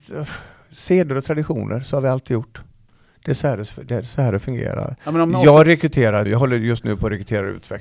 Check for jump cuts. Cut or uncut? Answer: cut